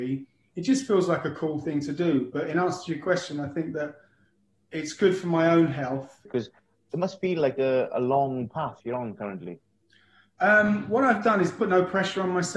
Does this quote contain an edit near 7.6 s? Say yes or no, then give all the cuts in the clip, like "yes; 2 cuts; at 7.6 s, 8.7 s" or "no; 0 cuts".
yes; 2 cuts; at 6.3 s, 7.6 s